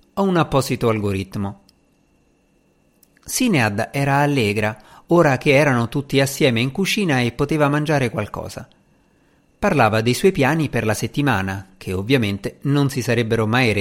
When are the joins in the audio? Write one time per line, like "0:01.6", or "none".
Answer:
none